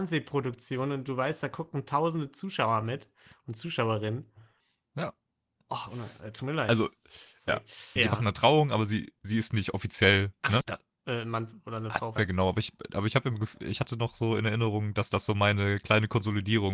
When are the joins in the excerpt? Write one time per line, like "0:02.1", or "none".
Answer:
0:08.0
0:10.6
0:12.2

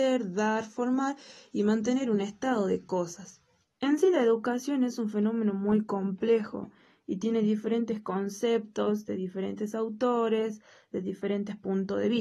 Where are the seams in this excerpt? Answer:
0:03.6

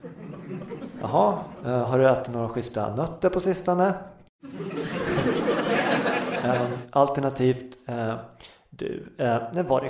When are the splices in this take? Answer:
none

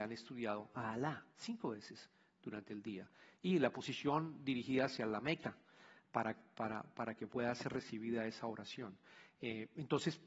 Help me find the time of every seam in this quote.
none

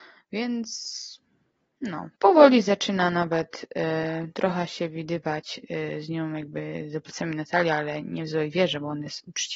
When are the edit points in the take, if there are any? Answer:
0:02.1

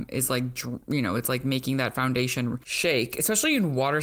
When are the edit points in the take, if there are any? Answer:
none

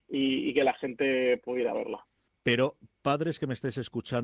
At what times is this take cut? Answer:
0:02.3

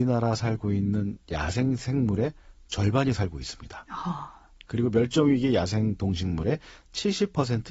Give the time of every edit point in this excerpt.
none

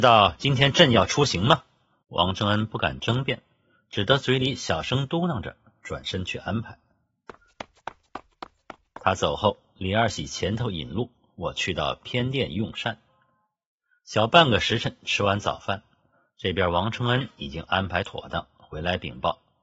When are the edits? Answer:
0:02.0

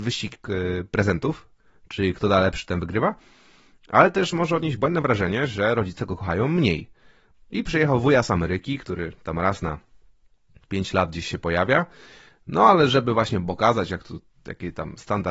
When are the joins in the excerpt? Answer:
0:07.3

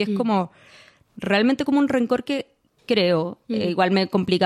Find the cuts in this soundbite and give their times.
0:02.7

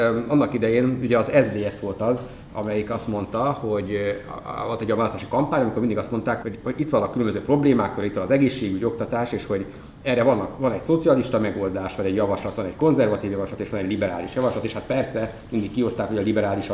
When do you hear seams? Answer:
0:06.4

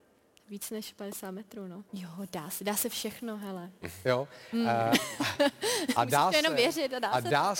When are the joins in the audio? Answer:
0:01.9

